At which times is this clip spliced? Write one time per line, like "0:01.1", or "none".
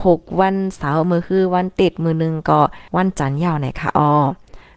0:02.9